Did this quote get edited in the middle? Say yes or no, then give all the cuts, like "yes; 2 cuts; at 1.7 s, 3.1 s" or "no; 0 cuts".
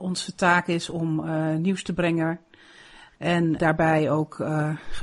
yes; 1 cut; at 3.6 s